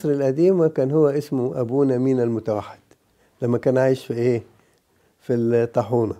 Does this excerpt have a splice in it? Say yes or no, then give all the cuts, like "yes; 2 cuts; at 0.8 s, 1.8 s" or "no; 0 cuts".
no; 0 cuts